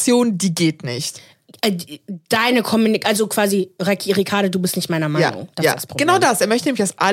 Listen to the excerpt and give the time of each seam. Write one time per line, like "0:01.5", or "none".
none